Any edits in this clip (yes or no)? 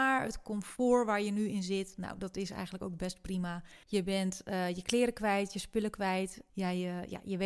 yes